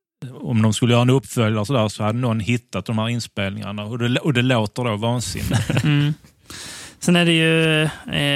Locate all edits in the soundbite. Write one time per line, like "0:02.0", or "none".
none